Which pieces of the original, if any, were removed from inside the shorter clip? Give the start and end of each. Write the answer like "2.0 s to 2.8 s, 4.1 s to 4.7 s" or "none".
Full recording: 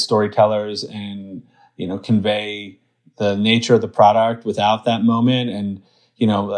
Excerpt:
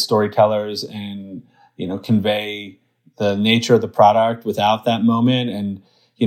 none

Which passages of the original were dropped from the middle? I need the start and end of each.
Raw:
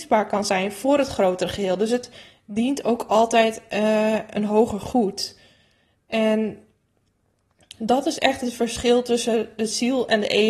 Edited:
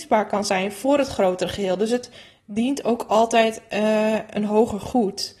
none

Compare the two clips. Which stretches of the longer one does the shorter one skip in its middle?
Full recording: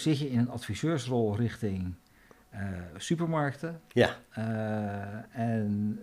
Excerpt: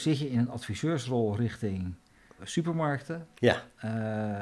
2.4 s to 2.9 s

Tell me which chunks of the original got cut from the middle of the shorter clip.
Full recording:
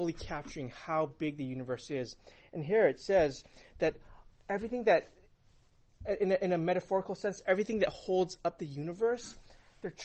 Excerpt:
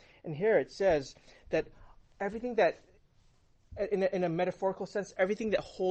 none

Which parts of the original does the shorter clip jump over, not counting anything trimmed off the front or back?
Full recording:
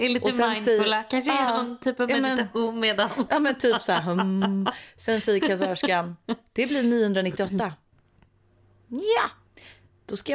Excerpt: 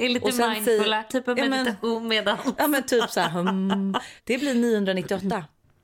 1.1 s to 1.8 s, 4.9 s to 6.5 s

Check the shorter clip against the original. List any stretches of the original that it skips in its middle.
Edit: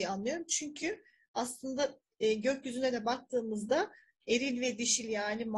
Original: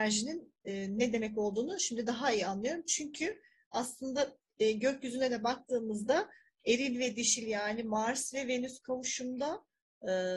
none

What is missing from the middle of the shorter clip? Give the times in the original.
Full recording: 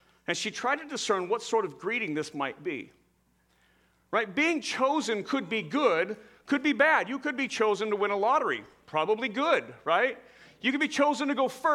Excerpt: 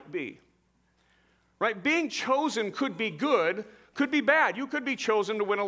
none

